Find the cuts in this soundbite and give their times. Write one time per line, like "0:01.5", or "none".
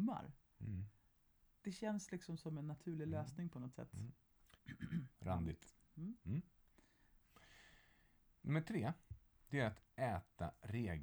0:04.6